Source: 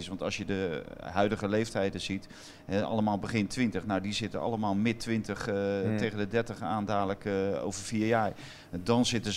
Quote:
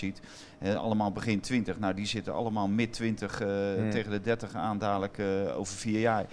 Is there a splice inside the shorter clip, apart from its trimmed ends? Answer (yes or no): no